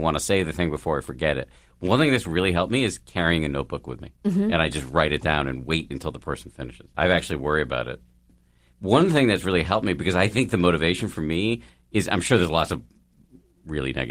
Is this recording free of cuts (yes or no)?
no